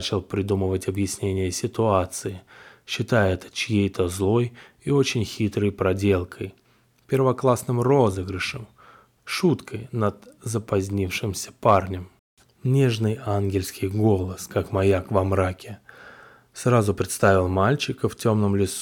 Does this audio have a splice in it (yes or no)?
yes